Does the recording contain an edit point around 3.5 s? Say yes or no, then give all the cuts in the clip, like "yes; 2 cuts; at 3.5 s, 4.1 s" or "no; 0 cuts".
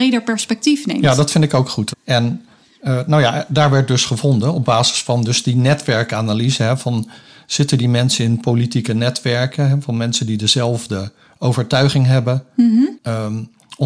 no; 2 cuts; at 1.9 s, 12.9 s